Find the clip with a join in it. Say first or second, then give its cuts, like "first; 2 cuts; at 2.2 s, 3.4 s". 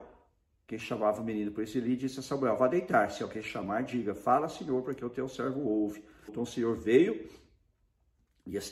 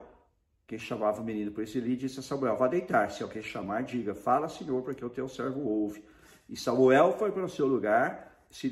first; 1 cut; at 6.3 s